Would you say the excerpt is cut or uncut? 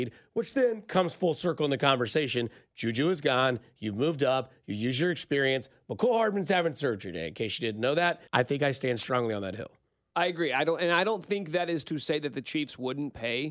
cut